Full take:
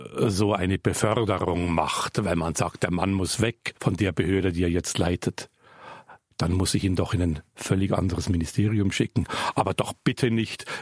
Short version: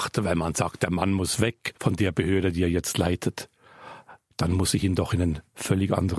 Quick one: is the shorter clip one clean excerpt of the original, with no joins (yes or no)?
yes